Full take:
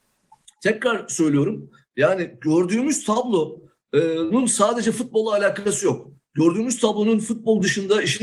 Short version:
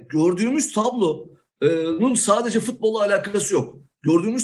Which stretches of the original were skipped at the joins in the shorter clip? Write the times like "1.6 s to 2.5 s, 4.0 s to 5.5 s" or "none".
none